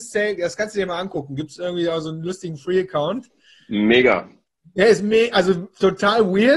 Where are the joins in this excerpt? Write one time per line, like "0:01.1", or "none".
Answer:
none